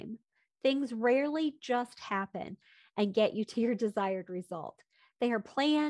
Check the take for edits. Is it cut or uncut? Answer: uncut